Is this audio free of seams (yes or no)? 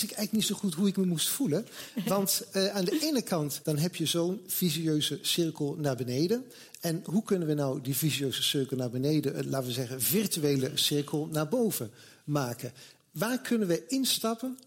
no